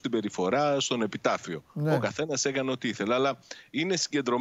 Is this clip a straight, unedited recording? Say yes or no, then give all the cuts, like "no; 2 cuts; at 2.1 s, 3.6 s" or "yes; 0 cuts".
yes; 0 cuts